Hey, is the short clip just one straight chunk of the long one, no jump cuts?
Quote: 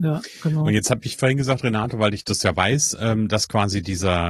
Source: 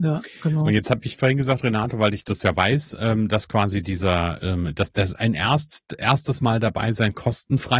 yes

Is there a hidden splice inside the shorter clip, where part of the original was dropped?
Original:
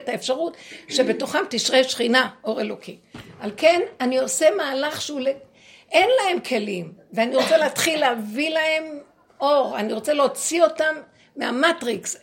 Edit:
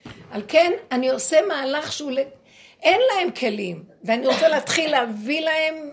no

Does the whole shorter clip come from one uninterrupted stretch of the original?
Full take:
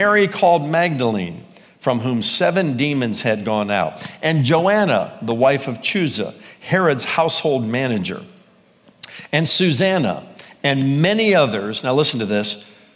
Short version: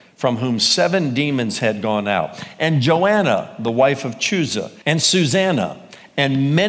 no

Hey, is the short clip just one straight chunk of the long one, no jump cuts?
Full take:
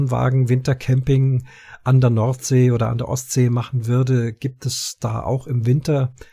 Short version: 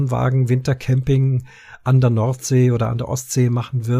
yes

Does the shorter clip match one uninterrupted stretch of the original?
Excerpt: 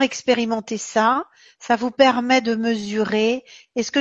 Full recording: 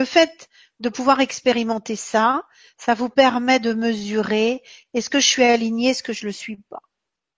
yes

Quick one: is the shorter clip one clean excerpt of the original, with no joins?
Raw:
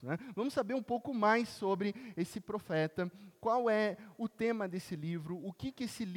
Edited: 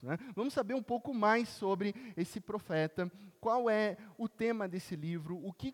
yes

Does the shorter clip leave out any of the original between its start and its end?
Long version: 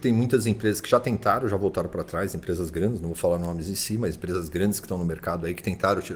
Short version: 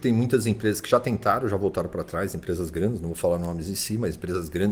no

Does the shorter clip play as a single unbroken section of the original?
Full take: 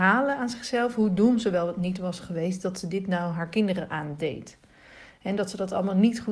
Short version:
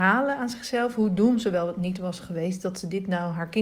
yes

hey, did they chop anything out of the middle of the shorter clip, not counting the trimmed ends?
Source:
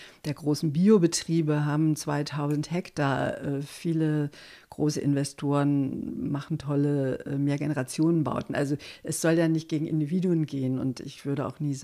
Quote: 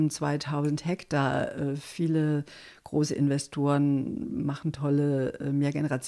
no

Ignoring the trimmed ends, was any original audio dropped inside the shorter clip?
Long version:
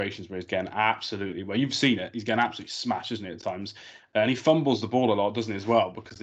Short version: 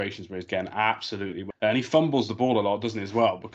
yes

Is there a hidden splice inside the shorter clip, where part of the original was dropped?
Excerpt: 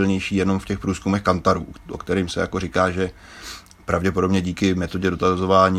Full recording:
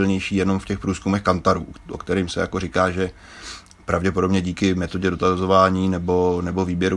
no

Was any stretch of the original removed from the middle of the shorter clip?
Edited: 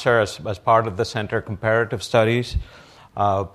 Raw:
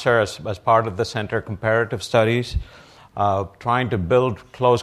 no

